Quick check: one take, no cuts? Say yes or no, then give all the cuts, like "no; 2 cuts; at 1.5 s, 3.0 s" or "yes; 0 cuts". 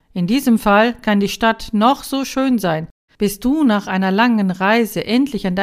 no; 1 cut; at 3.1 s